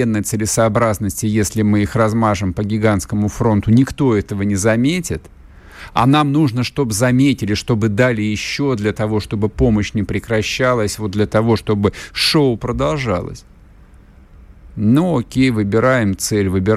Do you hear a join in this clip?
no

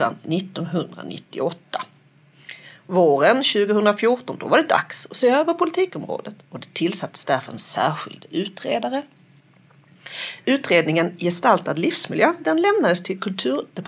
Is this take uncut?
yes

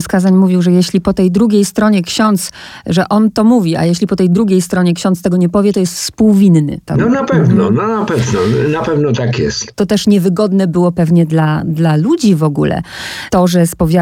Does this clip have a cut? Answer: no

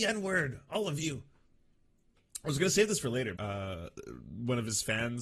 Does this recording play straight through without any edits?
no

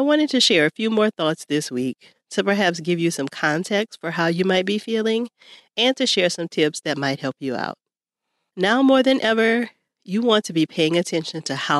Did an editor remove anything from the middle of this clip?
no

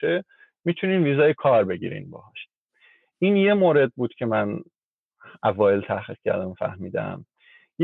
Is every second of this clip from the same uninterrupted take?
yes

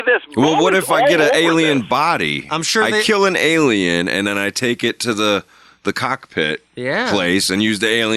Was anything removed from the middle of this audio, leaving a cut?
no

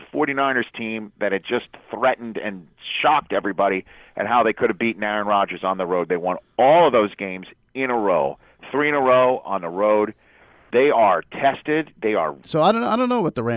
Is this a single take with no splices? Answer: no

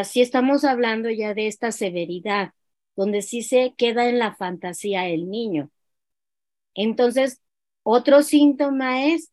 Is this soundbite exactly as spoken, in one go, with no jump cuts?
yes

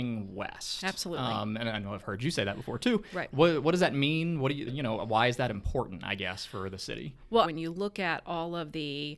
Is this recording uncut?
no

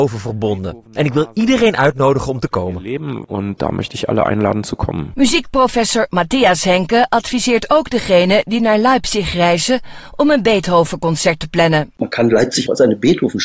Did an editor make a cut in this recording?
no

